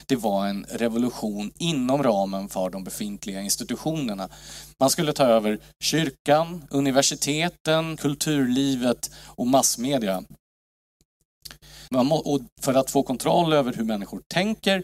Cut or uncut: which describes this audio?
cut